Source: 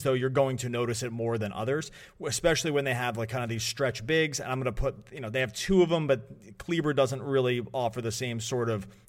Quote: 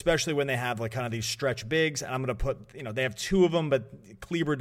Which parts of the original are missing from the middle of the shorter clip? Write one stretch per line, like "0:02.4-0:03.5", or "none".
none